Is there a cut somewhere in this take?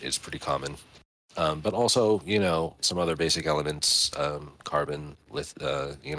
yes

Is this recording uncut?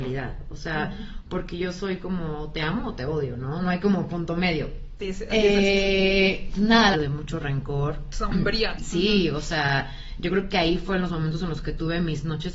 no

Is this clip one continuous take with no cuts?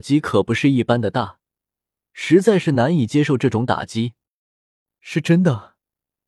yes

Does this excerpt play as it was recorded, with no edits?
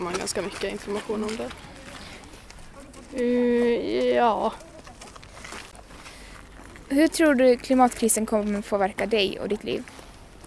yes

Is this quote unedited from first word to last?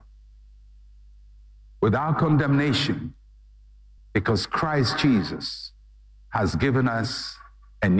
no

